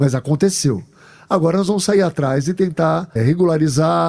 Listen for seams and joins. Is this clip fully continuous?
no; 1 cut; at 3.2 s

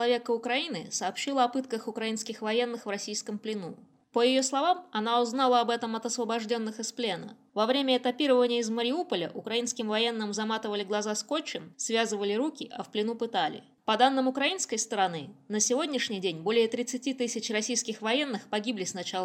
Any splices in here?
yes; 2 cuts; at 11.7 s, 13.7 s

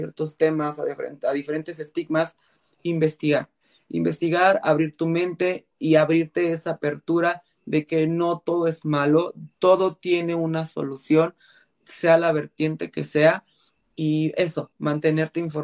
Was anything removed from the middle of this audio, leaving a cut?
no; 0 cuts

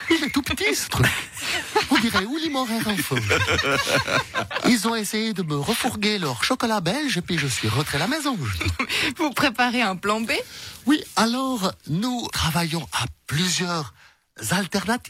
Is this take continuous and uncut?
no; 1 cut; at 12.3 s

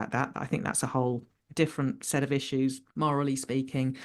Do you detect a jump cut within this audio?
yes; 1 cut; at 2.9 s

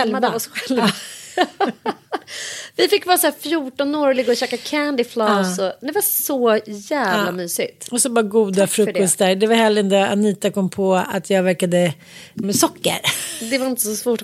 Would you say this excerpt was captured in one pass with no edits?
no; 1 cut; at 12.4 s

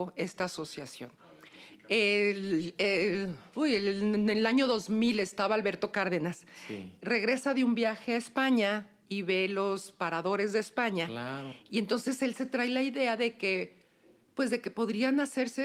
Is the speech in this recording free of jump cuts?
yes; 0 cuts

